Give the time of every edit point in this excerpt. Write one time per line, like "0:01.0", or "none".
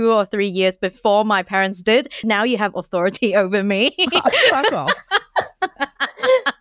0:02.2

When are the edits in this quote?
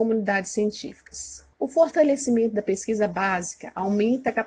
0:01.5

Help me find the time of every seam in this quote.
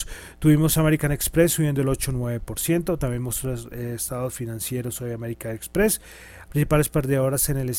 0:06.5

